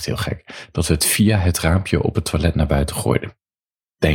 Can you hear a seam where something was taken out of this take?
no; 0 cuts

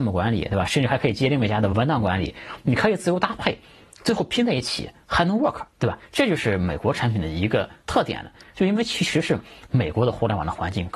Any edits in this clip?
yes; 1 cut; at 8.5 s

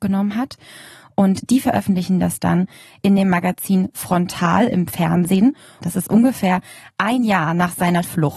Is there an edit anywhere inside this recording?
yes; 1 cut; at 5.8 s

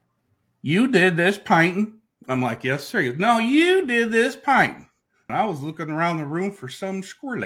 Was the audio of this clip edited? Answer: yes; 1 cut; at 5.3 s

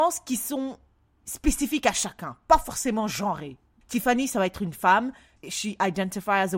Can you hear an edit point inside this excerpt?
no; 0 cuts

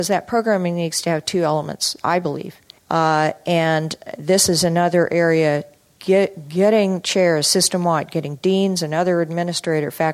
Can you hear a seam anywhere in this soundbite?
yes; 1 cut; at 2.8 s

